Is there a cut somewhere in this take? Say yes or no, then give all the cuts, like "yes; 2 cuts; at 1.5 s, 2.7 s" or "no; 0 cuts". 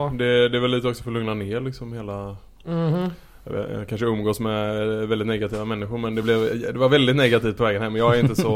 no; 0 cuts